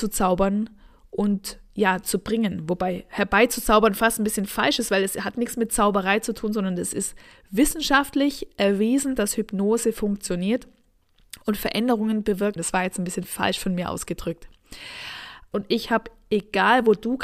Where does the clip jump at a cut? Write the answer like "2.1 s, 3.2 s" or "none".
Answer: 12.6 s, 15.5 s

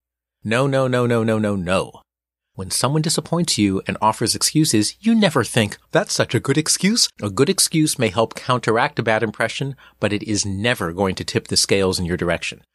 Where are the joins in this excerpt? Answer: 5.8 s, 7.1 s

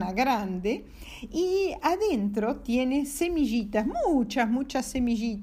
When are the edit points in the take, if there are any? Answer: none

